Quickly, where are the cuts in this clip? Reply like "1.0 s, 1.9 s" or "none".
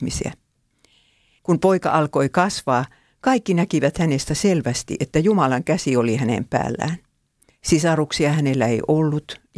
1.4 s, 7.5 s